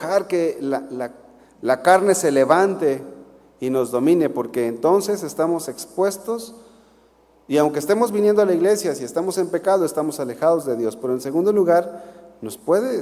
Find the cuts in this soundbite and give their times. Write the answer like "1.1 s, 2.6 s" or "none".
7.3 s